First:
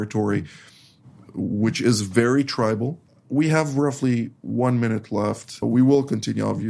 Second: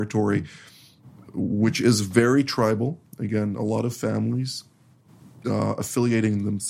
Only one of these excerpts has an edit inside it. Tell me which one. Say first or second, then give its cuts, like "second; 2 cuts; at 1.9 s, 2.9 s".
first; 2 cuts; at 3.1 s, 5.6 s